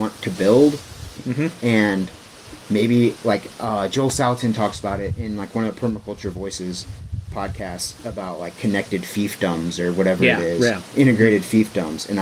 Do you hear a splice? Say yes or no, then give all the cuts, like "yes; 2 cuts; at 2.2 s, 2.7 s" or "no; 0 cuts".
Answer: yes; 1 cut; at 1.2 s